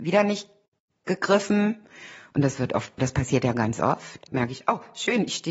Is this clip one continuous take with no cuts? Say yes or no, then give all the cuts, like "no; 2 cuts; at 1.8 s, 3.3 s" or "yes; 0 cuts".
no; 2 cuts; at 3.0 s, 4.3 s